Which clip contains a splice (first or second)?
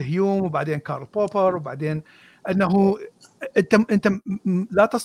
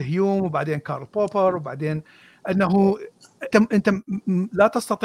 second